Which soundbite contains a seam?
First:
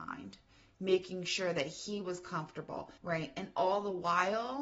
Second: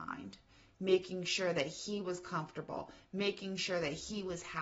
first; 1 cut; at 3.0 s

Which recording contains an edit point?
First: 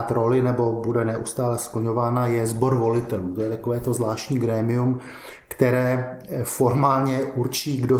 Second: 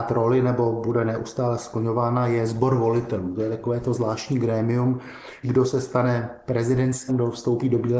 second; 2 cuts; at 5.4 s, 7.1 s

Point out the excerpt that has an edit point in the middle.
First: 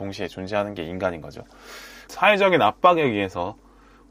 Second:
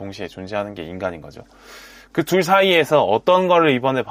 first; 1 cut; at 2.1 s

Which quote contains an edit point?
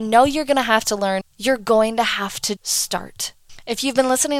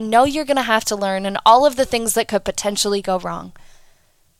first; 2 cuts; at 1.2 s, 2.6 s

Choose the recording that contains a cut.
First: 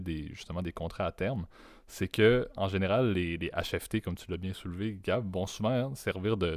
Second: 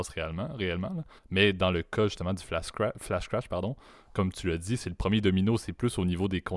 second; 1 cut; at 1.2 s

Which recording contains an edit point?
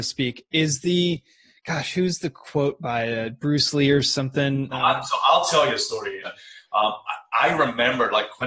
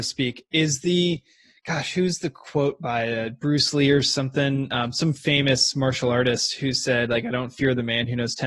first; 2 cuts; at 4.7 s, 6.2 s

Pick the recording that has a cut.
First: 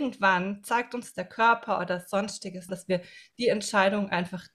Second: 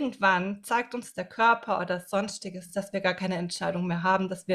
first; 1 cut; at 2.7 s

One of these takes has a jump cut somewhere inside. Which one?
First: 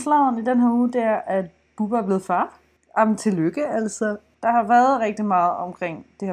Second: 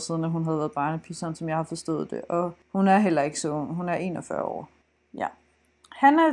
first; 1 cut; at 4.3 s

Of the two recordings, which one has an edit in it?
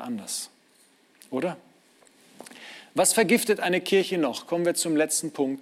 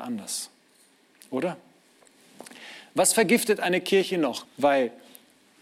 second; 1 cut; at 4.4 s

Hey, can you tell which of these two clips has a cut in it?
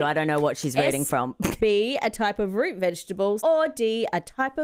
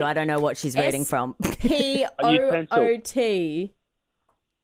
first; 2 cuts; at 1.6 s, 3.4 s

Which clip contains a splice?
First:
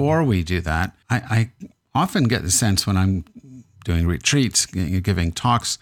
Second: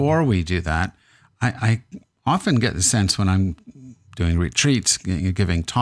first; 1 cut; at 1.0 s

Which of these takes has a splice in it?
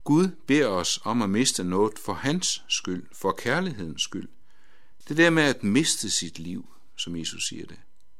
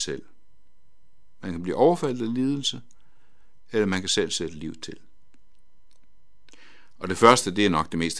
first; 1 cut; at 5.0 s

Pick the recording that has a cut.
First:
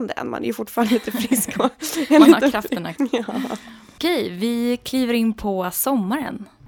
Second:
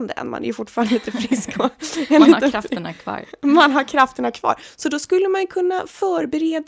first; 1 cut; at 3.0 s

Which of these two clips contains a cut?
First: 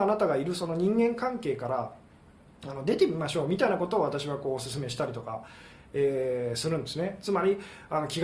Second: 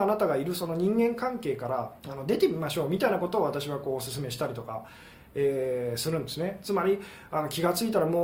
second; 1 cut; at 2.0 s

